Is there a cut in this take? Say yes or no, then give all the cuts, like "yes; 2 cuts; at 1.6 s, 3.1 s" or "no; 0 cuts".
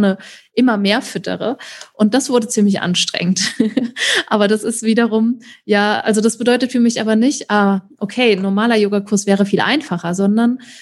no; 0 cuts